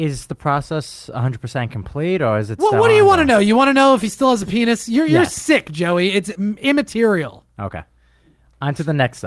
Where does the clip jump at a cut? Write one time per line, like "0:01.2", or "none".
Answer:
none